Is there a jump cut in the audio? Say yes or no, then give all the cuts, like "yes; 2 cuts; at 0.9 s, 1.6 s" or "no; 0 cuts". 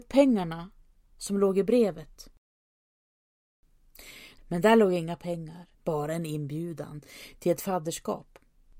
yes; 2 cuts; at 4.4 s, 5.7 s